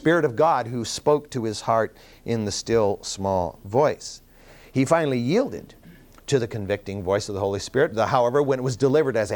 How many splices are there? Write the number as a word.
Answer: zero